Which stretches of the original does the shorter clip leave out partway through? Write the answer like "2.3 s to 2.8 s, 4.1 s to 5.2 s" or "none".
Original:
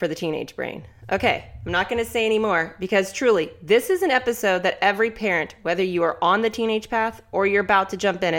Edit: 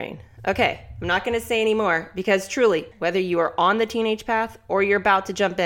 3.6 s to 5.5 s